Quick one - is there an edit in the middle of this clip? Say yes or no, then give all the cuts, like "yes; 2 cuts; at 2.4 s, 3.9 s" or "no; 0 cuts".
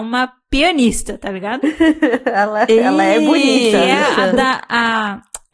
no; 0 cuts